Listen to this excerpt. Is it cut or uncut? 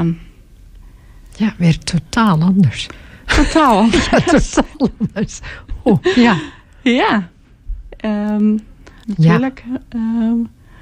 cut